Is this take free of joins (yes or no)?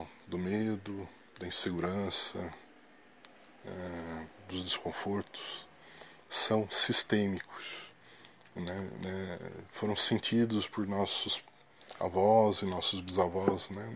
yes